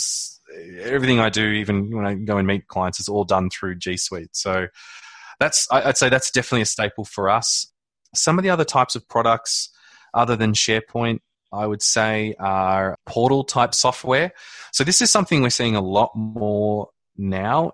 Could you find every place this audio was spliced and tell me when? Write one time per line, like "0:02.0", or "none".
0:12.9